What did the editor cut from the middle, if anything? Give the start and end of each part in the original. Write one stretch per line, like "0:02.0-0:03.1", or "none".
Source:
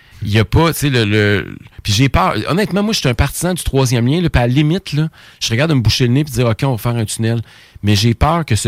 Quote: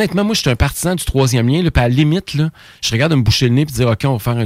none